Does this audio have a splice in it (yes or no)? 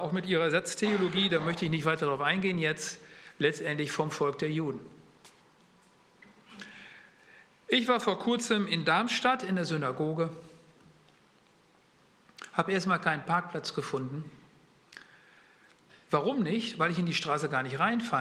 no